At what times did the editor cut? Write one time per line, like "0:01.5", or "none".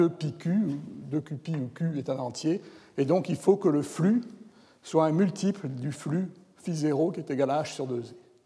none